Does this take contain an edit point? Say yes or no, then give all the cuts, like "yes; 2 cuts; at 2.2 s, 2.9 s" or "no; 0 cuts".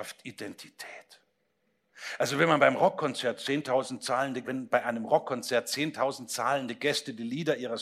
yes; 1 cut; at 4.4 s